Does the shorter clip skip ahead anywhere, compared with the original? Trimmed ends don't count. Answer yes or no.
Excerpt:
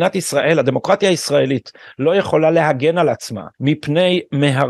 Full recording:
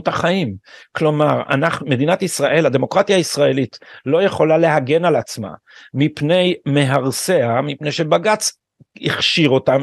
yes